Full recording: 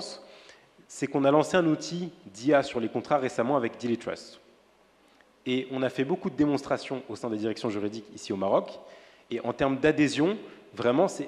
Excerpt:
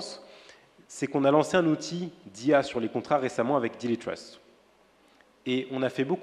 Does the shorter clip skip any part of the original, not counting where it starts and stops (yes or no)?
no